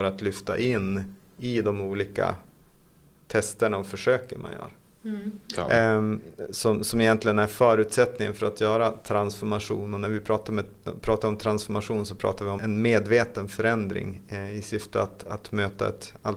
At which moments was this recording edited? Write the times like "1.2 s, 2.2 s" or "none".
5.5 s, 12.6 s